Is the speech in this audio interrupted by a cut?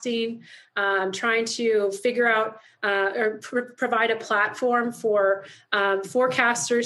no; 0 cuts

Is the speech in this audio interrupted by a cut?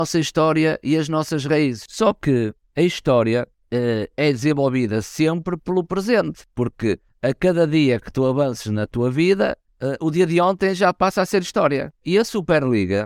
yes; 1 cut; at 12.0 s

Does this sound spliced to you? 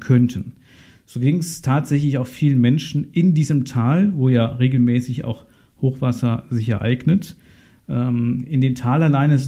no; 0 cuts

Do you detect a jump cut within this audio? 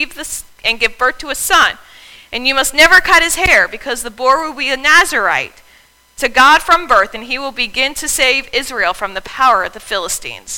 no; 0 cuts

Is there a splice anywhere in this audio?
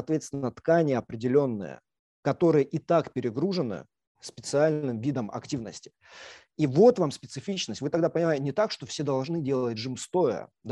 no; 0 cuts

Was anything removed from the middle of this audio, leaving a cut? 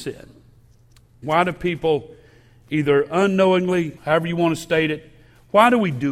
yes; 2 cuts; at 1.2 s, 4.0 s

